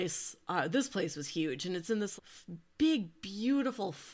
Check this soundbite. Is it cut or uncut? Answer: cut